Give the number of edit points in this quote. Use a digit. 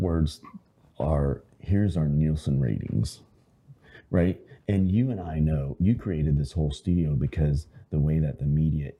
0